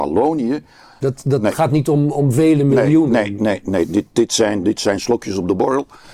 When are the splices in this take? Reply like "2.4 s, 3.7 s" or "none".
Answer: 1.0 s